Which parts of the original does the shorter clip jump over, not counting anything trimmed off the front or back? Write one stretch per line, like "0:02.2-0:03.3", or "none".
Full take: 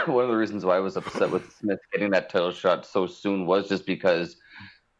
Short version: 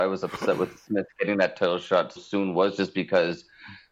0:02.9-0:03.1